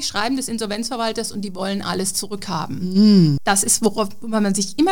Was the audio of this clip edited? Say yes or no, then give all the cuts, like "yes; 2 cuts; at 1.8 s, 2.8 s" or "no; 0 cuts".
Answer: yes; 1 cut; at 3.4 s